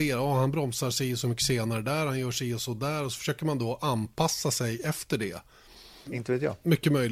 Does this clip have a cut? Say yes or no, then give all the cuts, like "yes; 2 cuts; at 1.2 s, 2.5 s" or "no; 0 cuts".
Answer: yes; 1 cut; at 6.1 s